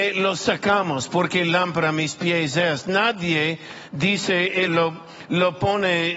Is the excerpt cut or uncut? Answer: cut